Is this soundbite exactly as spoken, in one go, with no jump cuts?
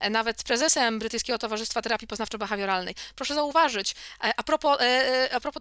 yes; 0 cuts

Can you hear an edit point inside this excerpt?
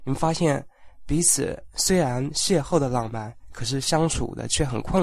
no; 0 cuts

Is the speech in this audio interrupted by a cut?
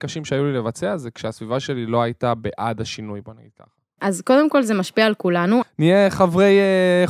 yes; 2 cuts; at 4.0 s, 5.6 s

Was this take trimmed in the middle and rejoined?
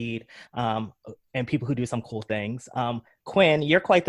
no; 0 cuts

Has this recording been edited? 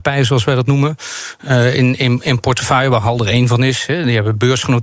no; 0 cuts

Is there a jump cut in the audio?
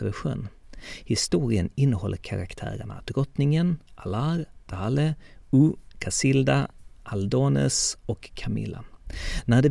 no; 0 cuts

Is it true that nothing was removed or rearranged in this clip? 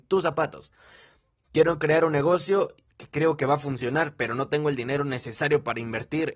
yes; 0 cuts

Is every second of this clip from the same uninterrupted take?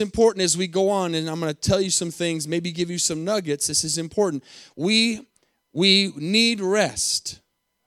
yes; 0 cuts

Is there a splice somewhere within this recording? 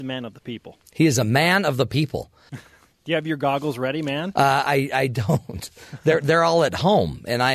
yes; 1 cut; at 2.5 s

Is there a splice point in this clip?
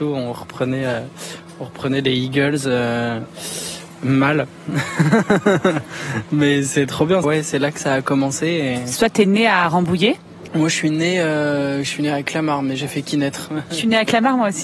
yes; 1 cut; at 7.2 s

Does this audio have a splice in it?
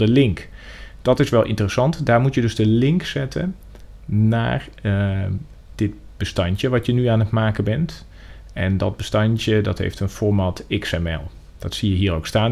no; 0 cuts

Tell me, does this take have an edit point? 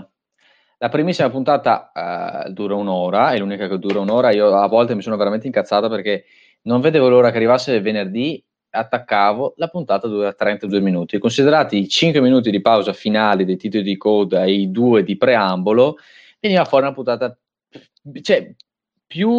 no; 0 cuts

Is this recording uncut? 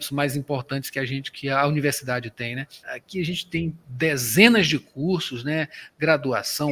no; 1 cut; at 2.8 s

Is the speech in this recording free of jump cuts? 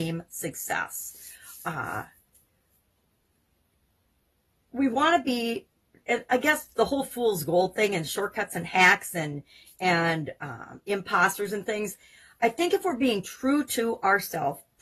yes; 0 cuts

